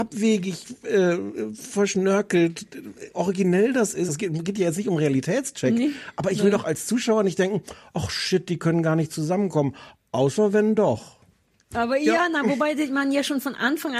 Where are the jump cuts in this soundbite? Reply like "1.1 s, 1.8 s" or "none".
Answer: none